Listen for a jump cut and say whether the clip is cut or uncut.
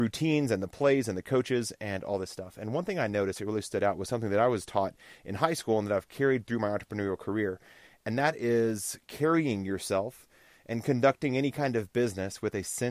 uncut